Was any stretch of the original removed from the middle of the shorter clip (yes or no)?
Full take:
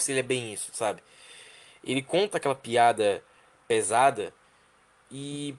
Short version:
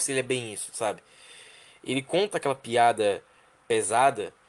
no